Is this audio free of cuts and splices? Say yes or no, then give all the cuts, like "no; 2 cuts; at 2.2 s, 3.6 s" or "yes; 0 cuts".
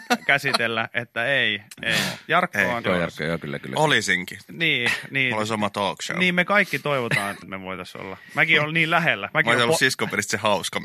no; 2 cuts; at 2.8 s, 7.4 s